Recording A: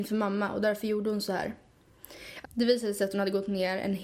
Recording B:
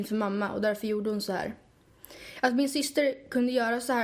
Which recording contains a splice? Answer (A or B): A